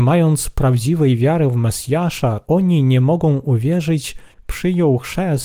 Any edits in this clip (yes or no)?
yes